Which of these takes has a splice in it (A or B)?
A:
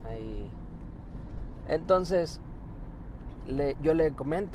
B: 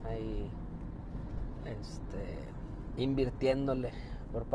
A